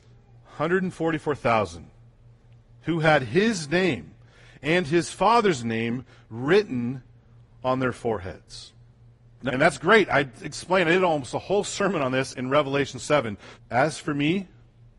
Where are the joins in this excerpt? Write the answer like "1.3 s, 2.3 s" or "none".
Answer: 9.5 s, 13.5 s